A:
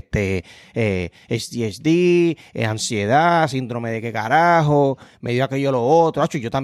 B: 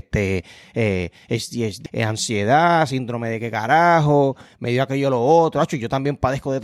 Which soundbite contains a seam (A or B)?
B